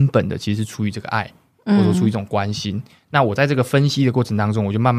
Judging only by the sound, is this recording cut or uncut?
uncut